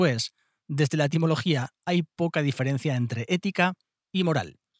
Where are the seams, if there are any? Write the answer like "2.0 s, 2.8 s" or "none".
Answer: none

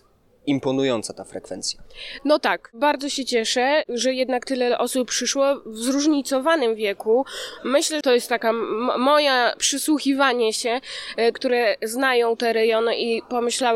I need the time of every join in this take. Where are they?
8.0 s, 11.3 s

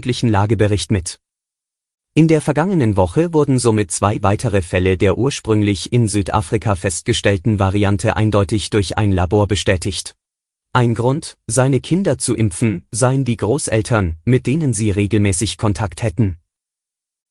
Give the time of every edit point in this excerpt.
10.6 s

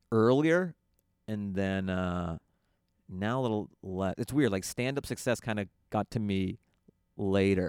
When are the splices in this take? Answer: none

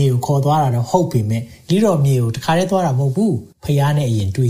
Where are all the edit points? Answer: 3.5 s

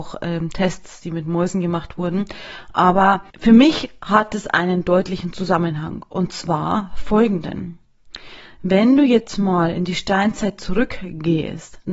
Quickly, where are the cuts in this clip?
none

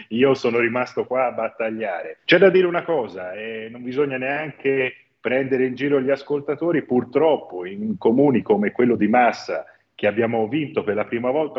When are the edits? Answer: 2.2 s

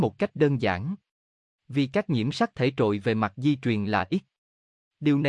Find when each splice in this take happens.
none

